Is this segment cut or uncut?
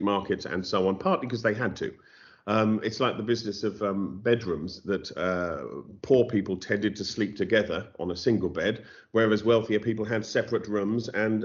uncut